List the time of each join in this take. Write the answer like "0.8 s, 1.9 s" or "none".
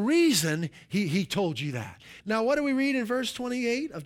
2.2 s